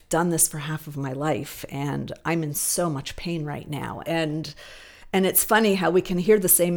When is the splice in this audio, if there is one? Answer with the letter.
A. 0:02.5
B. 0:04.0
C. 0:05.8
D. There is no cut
B